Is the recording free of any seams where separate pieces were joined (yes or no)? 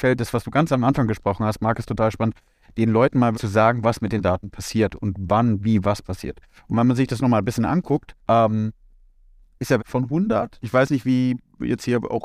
no